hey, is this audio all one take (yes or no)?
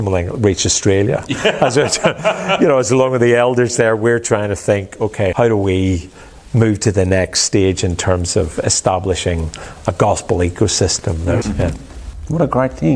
no